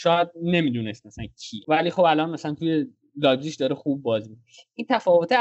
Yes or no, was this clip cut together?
no